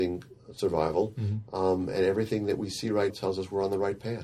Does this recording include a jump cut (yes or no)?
yes